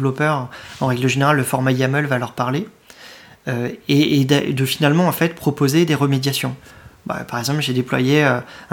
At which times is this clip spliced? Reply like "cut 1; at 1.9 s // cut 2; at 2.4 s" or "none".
none